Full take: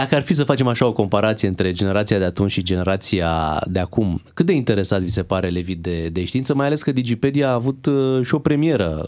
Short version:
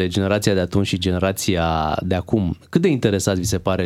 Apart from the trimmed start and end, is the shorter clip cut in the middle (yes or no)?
no